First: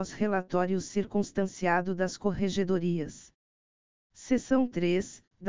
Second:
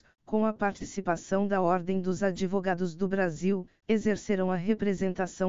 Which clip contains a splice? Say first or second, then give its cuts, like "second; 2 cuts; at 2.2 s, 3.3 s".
second; 1 cut; at 3.8 s